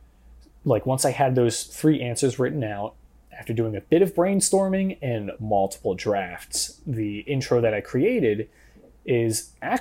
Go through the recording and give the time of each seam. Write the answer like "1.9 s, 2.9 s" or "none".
5.4 s

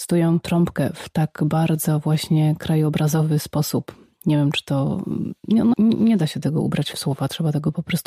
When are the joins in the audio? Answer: 5.7 s

